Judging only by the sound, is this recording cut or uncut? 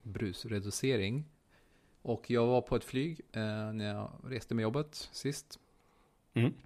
uncut